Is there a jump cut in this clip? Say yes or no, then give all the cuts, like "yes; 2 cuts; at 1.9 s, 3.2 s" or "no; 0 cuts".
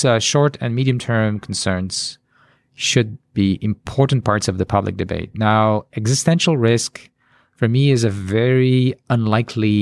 no; 0 cuts